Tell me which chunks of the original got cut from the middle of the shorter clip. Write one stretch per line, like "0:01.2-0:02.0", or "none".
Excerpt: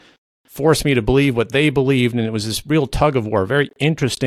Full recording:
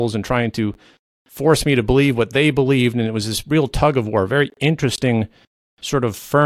none